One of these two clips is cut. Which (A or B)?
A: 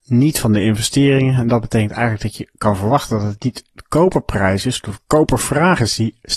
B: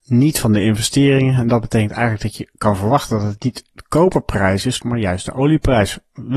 B